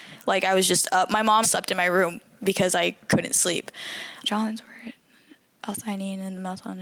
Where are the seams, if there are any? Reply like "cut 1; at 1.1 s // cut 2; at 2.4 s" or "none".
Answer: cut 1; at 1.4 s // cut 2; at 4.2 s